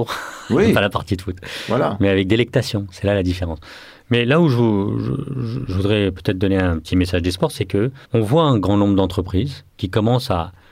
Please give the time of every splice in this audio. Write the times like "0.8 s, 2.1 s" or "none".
8.0 s